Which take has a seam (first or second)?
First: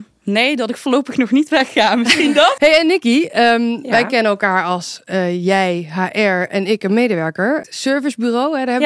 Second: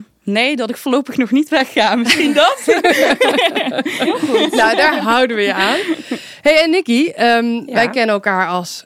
first